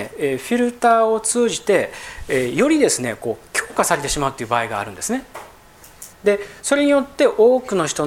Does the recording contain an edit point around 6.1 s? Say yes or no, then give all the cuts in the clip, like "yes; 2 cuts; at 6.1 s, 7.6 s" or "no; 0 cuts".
yes; 1 cut; at 6.1 s